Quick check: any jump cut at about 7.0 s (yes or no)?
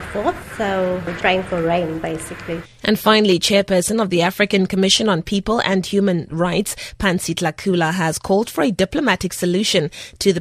no